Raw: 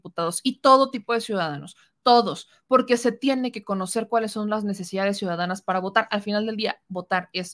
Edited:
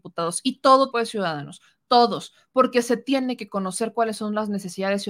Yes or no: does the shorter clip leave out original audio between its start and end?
yes